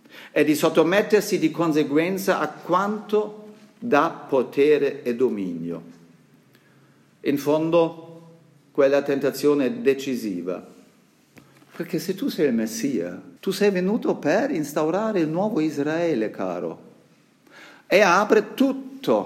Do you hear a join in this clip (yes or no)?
yes